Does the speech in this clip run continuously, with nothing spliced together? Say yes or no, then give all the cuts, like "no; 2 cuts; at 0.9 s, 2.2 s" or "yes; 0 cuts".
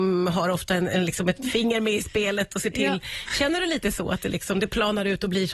yes; 0 cuts